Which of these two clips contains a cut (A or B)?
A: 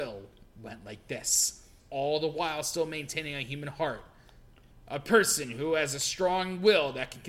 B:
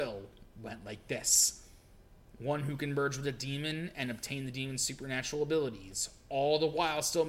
A